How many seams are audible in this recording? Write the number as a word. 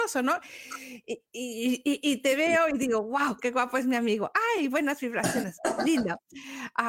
zero